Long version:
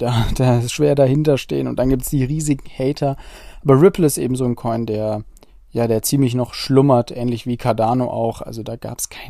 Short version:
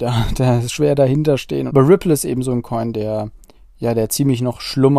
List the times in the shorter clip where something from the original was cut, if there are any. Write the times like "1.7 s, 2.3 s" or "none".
1.7 s